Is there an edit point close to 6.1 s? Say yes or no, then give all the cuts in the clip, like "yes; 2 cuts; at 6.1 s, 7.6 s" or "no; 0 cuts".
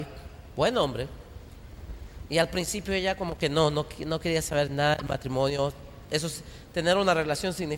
no; 0 cuts